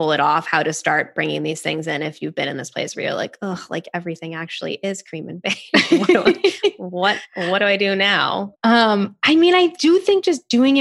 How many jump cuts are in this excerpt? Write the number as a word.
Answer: one